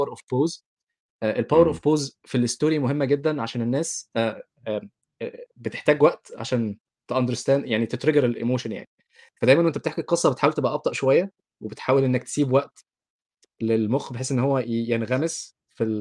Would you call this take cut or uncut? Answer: cut